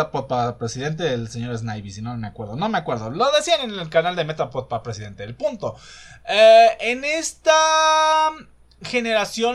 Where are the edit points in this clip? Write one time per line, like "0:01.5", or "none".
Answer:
none